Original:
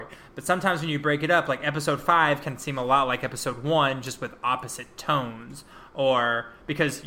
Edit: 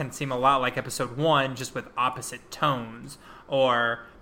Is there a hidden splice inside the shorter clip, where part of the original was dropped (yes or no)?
no